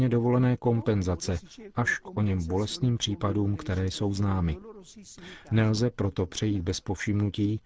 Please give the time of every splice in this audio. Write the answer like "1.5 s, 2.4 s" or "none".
none